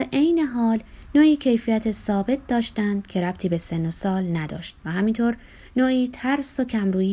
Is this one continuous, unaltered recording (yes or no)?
yes